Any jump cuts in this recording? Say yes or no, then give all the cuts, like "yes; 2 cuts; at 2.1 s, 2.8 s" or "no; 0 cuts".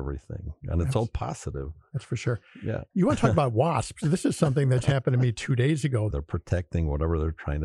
yes; 2 cuts; at 4.8 s, 6.1 s